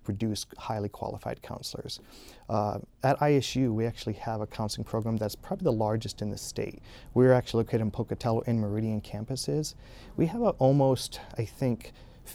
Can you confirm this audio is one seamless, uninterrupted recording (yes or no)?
yes